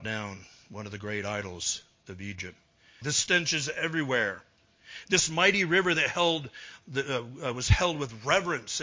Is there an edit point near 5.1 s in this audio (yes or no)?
no